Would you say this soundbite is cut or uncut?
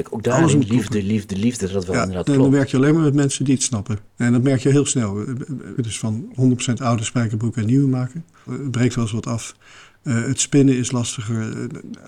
cut